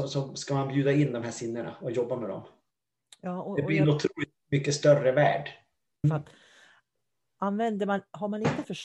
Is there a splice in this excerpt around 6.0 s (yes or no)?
yes